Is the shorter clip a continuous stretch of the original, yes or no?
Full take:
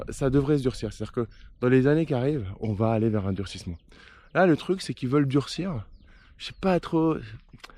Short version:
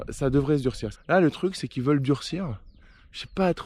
no